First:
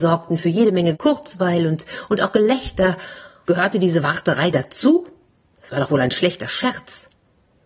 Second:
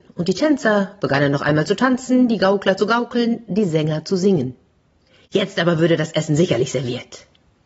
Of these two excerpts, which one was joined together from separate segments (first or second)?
first